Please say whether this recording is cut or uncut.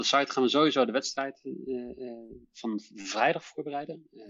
uncut